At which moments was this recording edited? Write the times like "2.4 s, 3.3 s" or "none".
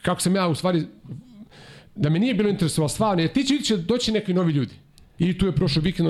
5.2 s